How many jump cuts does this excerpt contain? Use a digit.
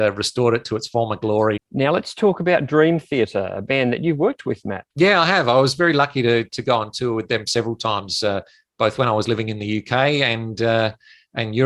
2